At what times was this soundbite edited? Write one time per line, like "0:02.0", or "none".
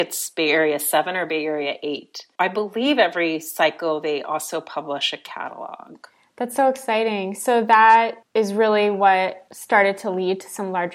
none

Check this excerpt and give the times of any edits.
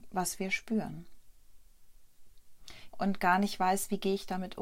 0:02.9

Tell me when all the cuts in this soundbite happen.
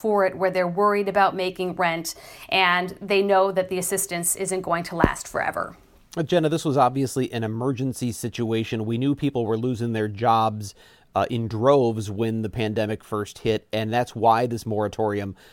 none

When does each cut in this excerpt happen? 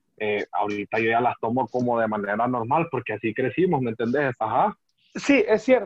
0:04.3

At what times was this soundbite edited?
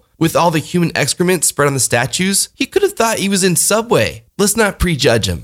none

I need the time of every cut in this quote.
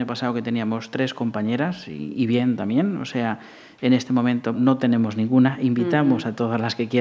0:04.5

